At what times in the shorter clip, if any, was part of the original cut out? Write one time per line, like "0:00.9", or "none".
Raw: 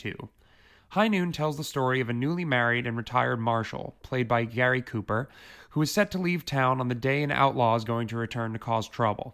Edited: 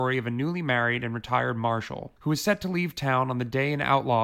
0:02.2